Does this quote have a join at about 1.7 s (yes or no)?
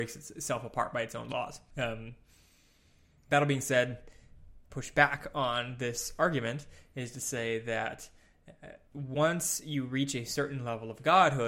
yes